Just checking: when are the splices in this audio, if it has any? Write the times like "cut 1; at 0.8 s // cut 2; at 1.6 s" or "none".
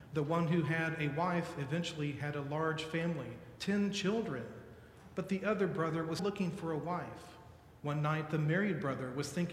cut 1; at 6.2 s // cut 2; at 7.8 s